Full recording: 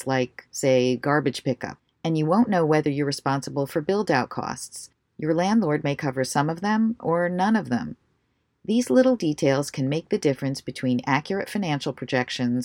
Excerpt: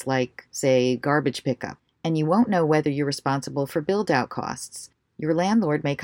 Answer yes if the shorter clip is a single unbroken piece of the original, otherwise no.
yes